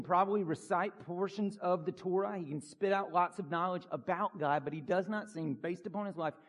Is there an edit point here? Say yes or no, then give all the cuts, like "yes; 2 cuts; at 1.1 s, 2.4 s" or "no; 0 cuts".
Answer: no; 0 cuts